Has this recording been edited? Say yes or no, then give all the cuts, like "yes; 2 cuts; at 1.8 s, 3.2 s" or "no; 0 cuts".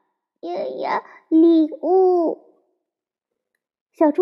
no; 0 cuts